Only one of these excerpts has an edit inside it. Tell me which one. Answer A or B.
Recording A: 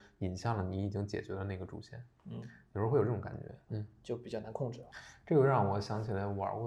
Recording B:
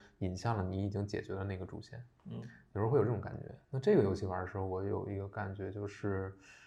A